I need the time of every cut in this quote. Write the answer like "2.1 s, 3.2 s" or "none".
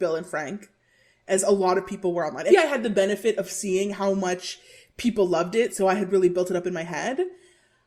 2.5 s

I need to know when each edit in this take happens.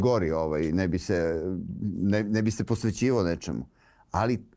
none

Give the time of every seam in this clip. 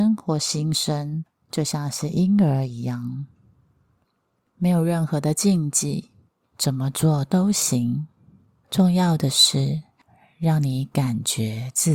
6.4 s

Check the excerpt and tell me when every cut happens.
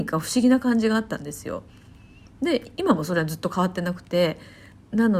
none

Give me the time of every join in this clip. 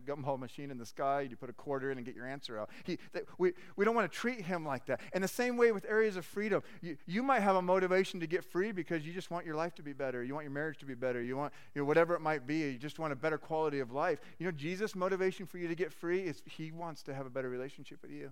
11.2 s

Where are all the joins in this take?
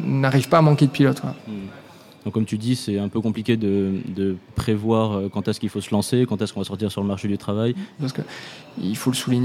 1.4 s, 8.0 s

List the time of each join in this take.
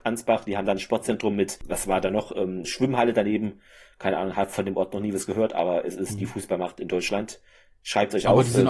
2.6 s

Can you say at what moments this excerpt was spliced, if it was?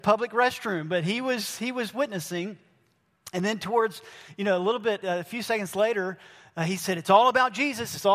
none

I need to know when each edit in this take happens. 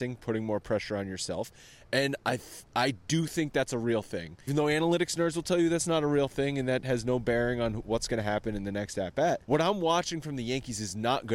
4.5 s, 9.4 s

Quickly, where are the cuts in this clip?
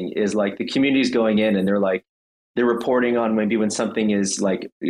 none

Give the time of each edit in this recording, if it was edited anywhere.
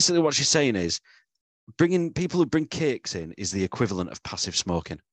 none

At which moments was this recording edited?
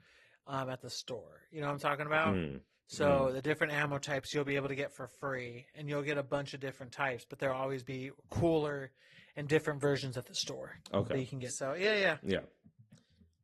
11.5 s

